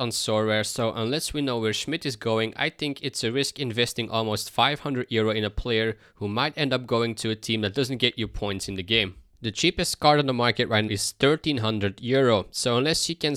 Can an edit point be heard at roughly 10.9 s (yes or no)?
yes